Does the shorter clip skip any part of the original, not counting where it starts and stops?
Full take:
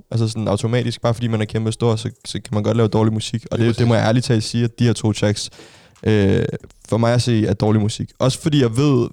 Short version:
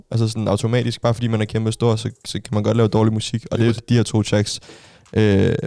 yes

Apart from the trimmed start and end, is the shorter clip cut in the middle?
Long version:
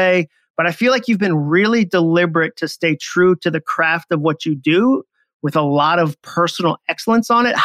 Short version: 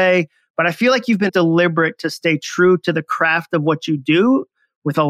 yes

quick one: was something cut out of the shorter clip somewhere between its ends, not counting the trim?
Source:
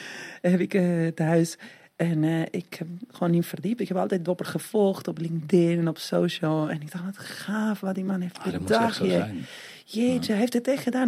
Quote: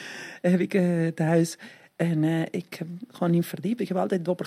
no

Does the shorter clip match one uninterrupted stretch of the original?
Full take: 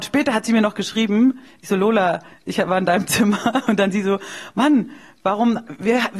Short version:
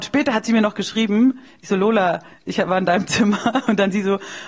yes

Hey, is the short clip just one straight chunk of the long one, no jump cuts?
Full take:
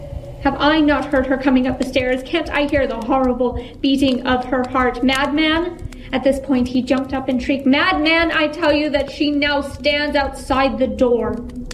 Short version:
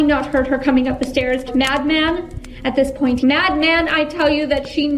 no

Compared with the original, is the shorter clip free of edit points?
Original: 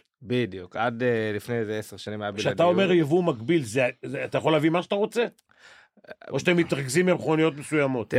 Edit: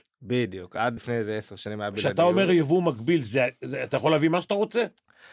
no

